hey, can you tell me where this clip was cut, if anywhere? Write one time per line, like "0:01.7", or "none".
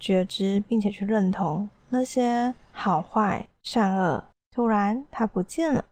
0:04.3

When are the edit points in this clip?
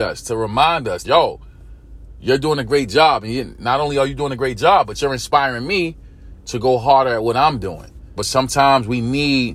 0:01.0
0:08.2

